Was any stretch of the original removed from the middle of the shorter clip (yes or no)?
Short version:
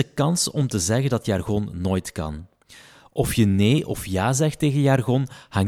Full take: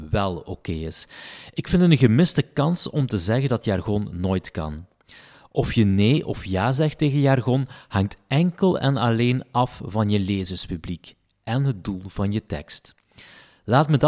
no